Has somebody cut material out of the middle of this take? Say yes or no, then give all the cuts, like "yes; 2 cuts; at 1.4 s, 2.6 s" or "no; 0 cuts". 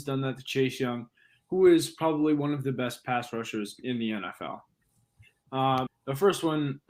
yes; 1 cut; at 5.9 s